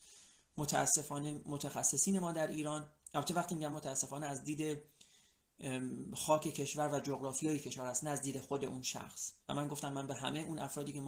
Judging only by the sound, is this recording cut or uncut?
cut